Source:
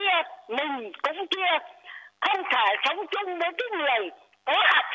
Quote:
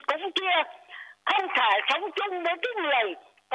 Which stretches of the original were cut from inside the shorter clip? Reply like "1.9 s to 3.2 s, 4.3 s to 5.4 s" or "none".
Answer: none